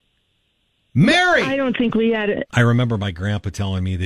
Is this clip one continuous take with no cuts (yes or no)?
no